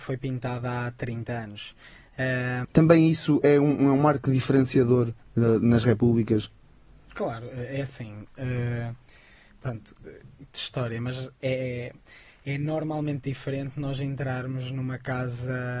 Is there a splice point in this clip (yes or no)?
yes